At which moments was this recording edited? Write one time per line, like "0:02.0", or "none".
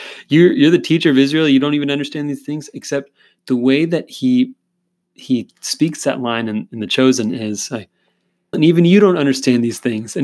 0:08.5